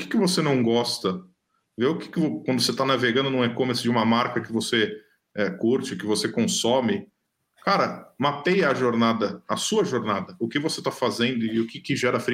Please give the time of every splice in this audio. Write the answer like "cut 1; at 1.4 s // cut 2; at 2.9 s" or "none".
none